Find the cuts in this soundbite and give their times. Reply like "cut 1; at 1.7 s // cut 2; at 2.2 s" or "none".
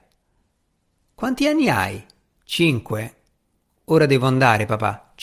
none